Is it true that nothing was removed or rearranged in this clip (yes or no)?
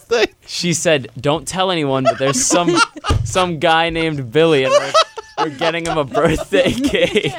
yes